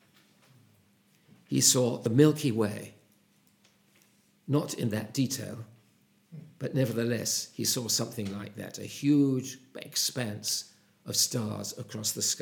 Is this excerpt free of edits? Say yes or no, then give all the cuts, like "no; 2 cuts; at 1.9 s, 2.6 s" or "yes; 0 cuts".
yes; 0 cuts